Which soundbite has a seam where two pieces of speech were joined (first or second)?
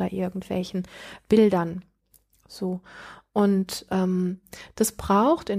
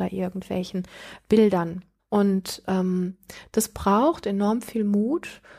second